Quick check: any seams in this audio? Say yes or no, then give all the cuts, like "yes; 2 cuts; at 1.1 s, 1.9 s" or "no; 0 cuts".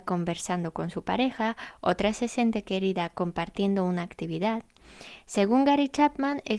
no; 0 cuts